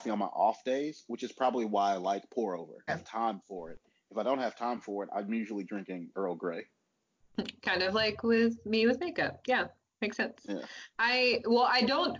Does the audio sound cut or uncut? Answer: cut